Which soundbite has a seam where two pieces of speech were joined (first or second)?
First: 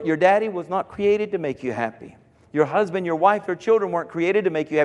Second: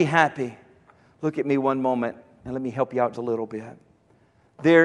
second